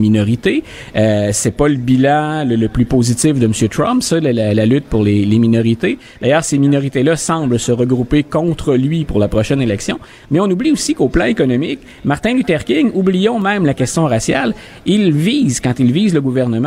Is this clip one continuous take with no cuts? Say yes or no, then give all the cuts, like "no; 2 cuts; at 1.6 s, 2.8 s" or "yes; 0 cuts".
yes; 0 cuts